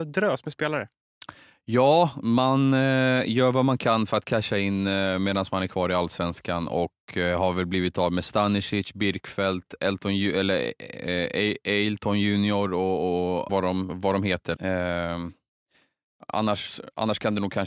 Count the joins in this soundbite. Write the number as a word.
two